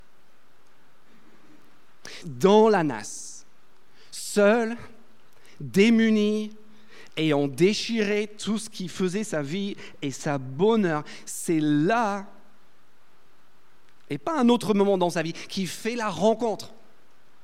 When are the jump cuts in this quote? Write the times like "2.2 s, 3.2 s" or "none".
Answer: 2.2 s